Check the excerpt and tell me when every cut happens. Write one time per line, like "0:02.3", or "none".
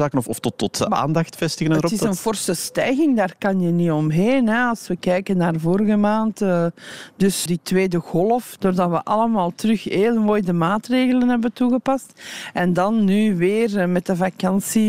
0:07.5
0:08.6

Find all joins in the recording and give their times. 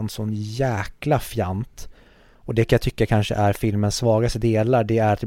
none

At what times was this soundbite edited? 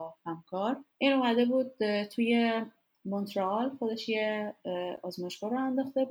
0:00.9

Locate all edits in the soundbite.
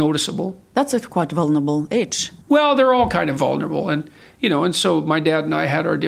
0:02.4

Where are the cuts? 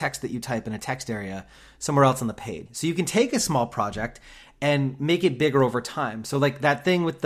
0:02.7

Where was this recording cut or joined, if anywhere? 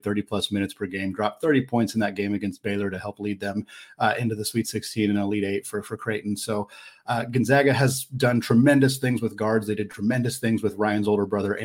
none

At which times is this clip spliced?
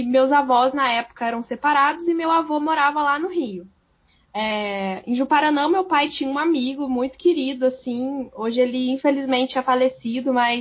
none

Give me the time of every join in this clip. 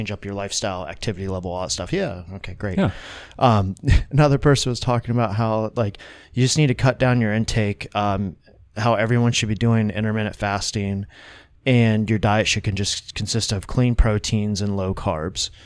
none

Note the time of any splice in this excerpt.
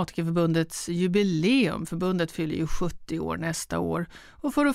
none

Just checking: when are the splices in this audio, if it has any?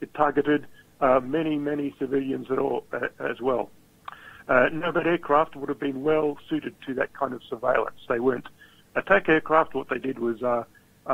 none

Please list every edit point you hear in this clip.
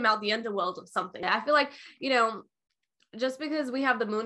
0:01.2

